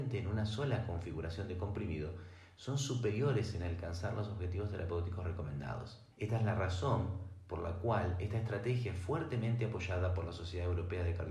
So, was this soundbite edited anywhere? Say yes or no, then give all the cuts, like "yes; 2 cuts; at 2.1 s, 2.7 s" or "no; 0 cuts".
yes; 1 cut; at 6.1 s